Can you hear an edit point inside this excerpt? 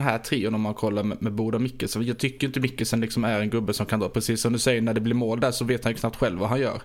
no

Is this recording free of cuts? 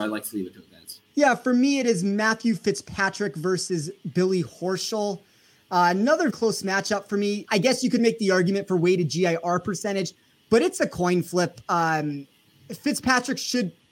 no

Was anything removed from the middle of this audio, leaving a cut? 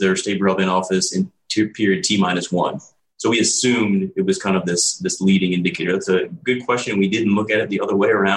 no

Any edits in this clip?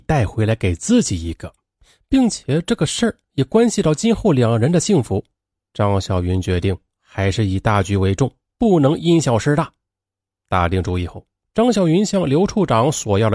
no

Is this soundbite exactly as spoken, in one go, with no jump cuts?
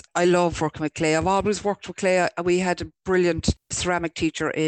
yes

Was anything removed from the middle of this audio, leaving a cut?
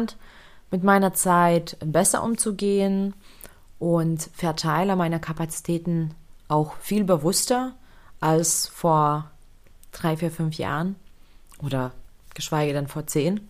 no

